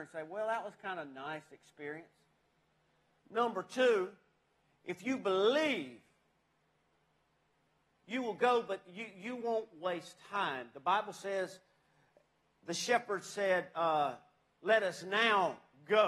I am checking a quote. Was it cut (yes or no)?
no